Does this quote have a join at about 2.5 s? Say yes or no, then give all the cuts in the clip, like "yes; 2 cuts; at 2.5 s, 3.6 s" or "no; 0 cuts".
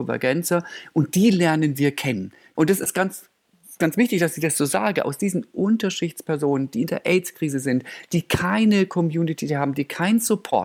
yes; 1 cut; at 2.5 s